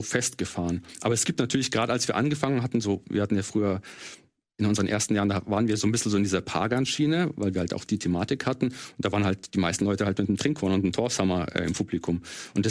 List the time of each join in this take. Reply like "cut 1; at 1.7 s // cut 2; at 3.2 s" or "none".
none